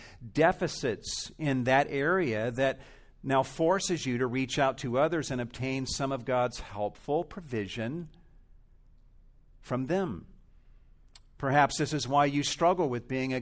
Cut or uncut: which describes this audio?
uncut